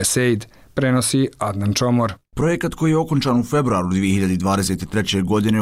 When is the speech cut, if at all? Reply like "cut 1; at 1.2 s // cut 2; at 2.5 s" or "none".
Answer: none